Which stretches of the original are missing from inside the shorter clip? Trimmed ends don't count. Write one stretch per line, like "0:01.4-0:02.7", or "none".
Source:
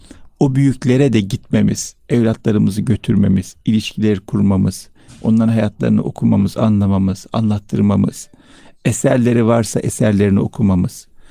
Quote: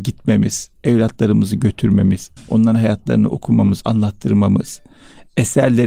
0:03.6-0:05.1
0:06.5-0:07.3

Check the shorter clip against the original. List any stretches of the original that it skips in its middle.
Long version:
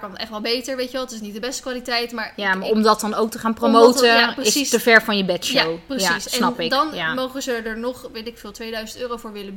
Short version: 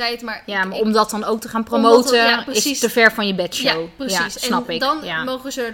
none

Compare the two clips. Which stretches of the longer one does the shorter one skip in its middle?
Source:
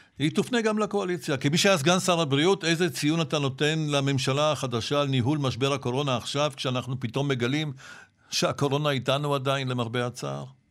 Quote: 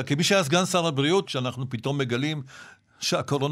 0:02.6-0:06.5

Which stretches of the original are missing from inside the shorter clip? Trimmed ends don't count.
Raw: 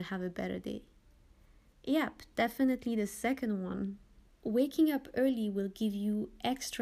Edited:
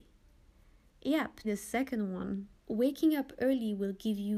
0:02.3-0:02.9
0:04.1-0:04.3

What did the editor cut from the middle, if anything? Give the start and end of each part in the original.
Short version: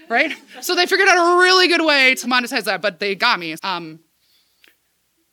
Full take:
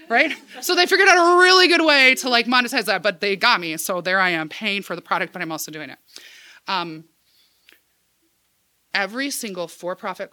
0:02.2-0:02.4
0:03.8-0:06.6

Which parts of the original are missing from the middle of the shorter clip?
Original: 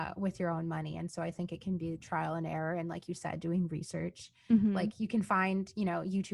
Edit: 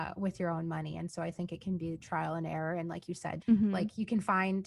0:03.4-0:04.4

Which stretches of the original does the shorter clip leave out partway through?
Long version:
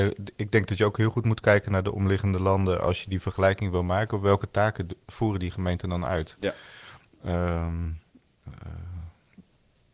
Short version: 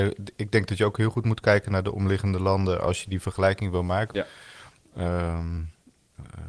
0:04.1-0:06.4

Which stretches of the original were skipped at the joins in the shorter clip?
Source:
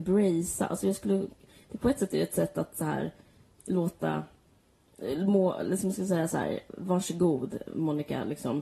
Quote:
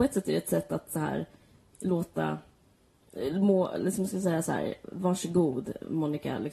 none

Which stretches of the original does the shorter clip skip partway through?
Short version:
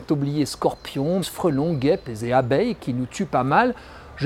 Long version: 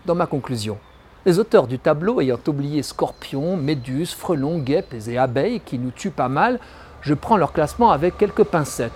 0:03.6-0:04.1

